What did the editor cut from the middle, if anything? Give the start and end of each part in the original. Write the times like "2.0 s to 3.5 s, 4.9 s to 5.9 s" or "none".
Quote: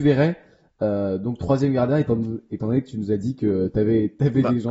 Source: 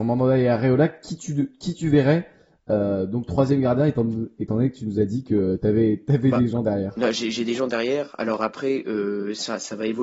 none

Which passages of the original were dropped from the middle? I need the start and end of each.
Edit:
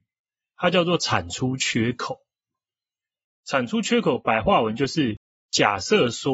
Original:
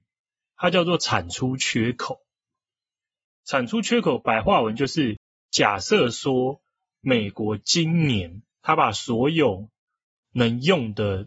none

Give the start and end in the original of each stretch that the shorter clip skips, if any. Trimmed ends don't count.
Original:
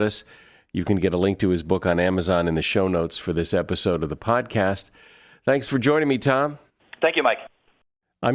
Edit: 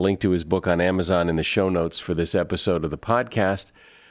none

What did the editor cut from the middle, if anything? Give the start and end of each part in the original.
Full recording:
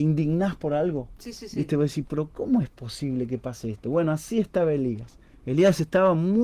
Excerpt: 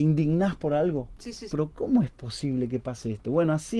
1.5 s to 2.1 s

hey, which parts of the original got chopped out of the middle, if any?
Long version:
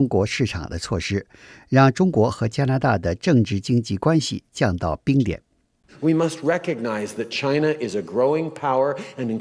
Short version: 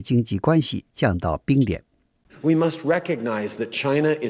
none

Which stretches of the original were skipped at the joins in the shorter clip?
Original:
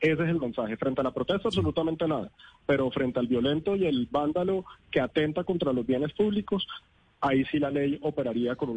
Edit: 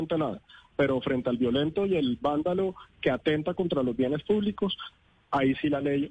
none

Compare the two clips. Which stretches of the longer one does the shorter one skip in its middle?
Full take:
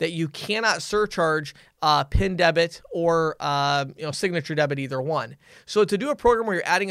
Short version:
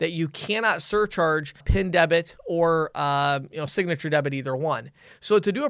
1.6 s to 2.1 s

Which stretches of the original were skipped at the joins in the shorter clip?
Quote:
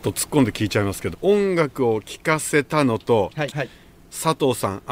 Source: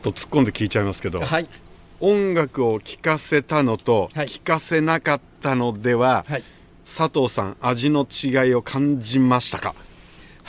1.1 s to 1.9 s, 4.3 s to 6.2 s

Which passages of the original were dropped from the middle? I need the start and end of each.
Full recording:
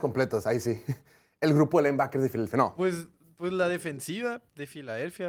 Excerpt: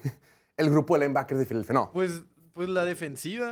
none

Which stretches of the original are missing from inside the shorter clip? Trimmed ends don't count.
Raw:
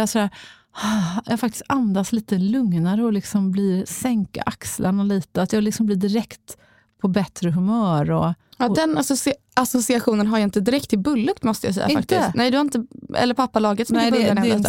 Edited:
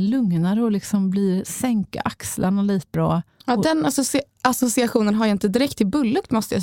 5.4 s to 8.1 s

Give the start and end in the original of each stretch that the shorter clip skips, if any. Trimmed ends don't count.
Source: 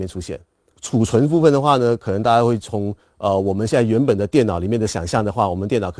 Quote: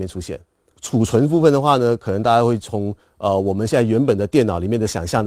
none

